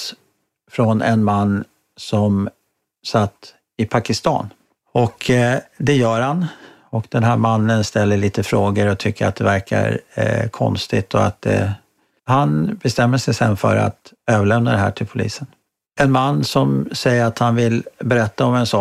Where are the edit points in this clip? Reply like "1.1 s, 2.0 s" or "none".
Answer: 4.7 s, 15.8 s

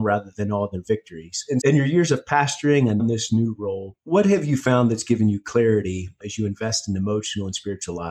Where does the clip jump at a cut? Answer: 1.6 s, 3.0 s

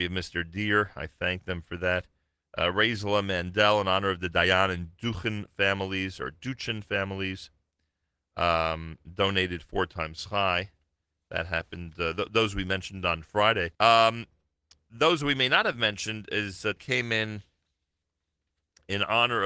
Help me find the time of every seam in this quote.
13.7 s, 16.8 s

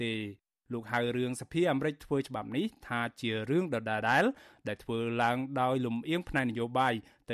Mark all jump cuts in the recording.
4.0 s

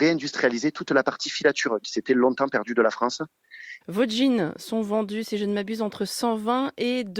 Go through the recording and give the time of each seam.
3.8 s

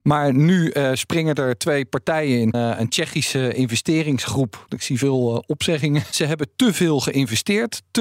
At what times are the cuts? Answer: 2.5 s, 4.7 s

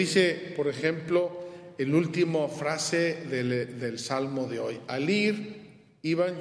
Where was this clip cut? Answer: none

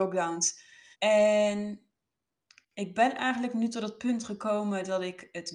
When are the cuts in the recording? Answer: 0.9 s

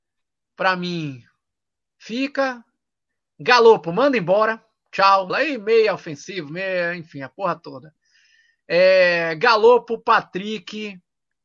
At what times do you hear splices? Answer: 5.3 s

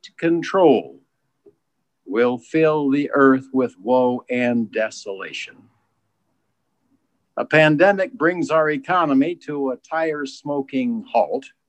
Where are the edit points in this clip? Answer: 7.3 s

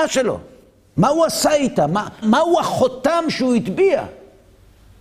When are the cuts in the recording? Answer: 2.2 s

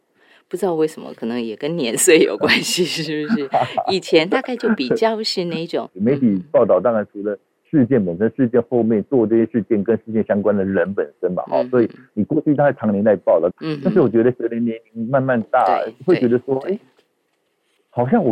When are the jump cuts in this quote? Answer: 5.9 s, 13.5 s

